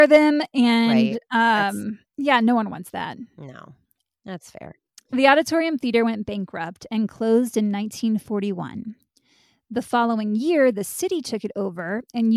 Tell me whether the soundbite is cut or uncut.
cut